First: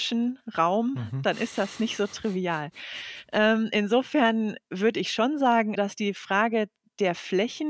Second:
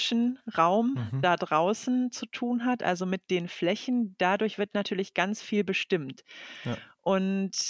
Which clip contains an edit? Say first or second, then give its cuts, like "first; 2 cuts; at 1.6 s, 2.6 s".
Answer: first; 2 cuts; at 1.2 s, 5.7 s